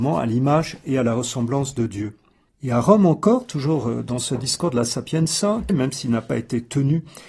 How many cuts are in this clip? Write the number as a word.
two